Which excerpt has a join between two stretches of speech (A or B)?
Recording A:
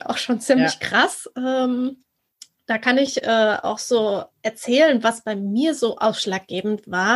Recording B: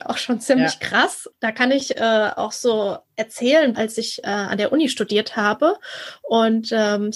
B